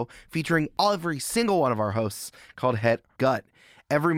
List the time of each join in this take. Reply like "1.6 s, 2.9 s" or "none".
3.2 s